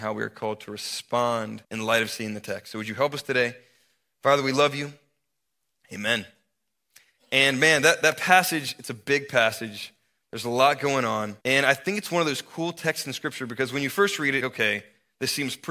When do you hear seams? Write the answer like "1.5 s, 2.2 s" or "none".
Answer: 1.6 s, 11.4 s, 14.4 s